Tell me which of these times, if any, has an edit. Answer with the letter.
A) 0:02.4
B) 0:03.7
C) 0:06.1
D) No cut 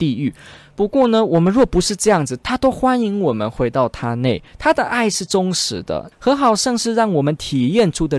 C